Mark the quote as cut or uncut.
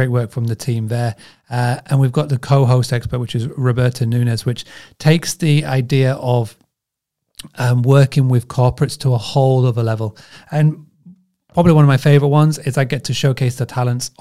uncut